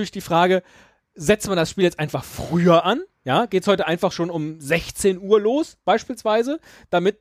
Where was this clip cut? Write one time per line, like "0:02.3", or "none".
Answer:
none